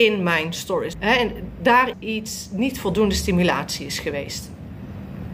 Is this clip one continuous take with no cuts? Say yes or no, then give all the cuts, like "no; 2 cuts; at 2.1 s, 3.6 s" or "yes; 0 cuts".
no; 2 cuts; at 0.9 s, 1.9 s